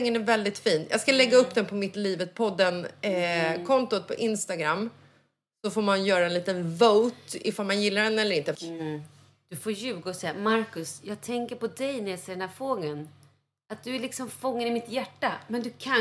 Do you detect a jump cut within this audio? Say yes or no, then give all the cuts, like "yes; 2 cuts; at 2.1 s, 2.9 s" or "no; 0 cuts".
yes; 1 cut; at 8.6 s